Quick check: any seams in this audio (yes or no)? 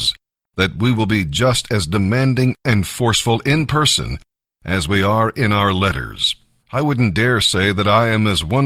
yes